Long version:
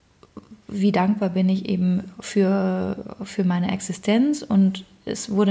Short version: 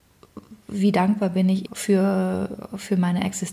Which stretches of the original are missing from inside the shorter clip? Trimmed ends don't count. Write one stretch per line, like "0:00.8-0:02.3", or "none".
0:01.7-0:02.1